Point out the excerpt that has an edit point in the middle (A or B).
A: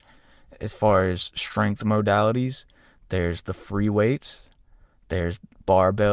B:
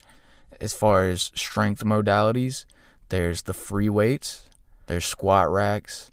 B